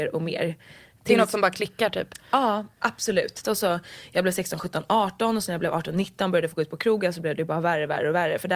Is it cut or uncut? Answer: cut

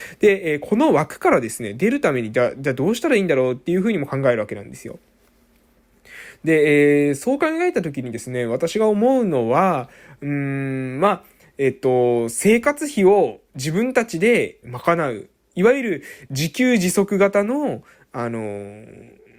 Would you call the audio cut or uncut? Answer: cut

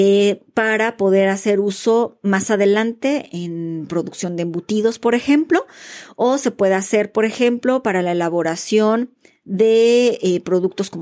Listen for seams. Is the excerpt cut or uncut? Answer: uncut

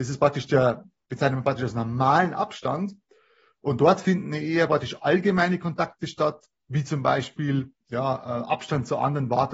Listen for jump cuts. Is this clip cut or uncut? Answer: cut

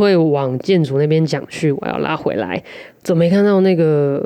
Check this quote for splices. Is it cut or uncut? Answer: cut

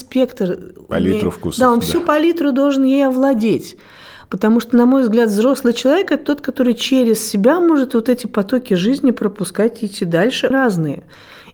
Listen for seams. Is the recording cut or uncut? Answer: cut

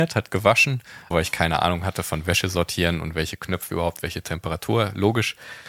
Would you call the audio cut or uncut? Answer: cut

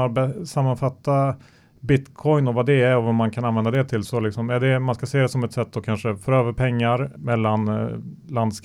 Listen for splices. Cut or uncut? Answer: cut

